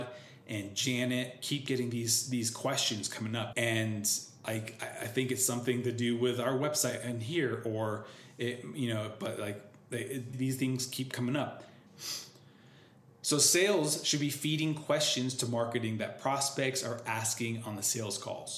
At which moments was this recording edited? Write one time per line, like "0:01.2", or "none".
0:03.5
0:10.3
0:11.9